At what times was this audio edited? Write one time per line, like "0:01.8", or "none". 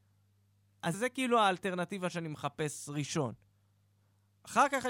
0:00.9